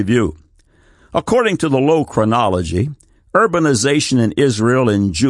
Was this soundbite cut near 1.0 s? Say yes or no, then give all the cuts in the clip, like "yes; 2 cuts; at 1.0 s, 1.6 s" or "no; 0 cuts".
no; 0 cuts